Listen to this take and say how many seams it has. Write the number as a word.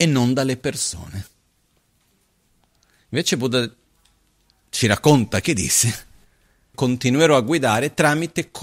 one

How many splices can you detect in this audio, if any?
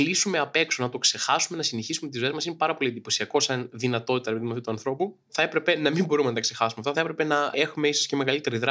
two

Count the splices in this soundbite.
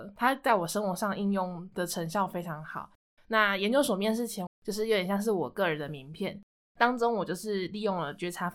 two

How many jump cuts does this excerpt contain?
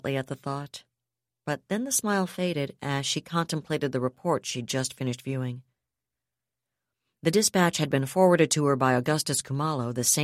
zero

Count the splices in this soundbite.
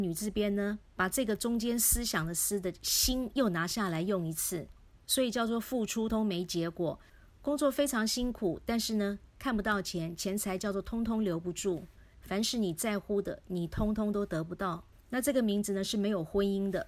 two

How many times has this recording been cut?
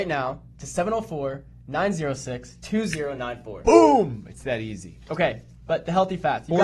zero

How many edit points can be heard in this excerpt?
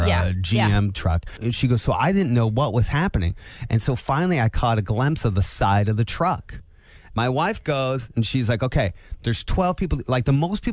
one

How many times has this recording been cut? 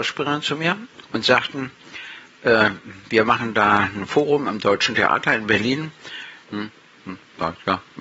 one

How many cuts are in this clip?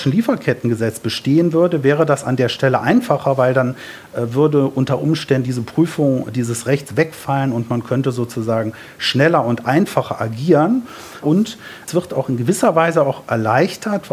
two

